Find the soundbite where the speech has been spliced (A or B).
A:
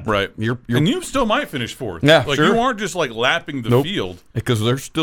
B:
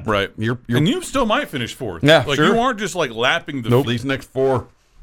B